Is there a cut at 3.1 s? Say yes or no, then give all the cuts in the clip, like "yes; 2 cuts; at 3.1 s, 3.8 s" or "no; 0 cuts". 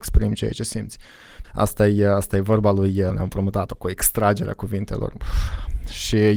yes; 3 cuts; at 1.4 s, 3.1 s, 5.1 s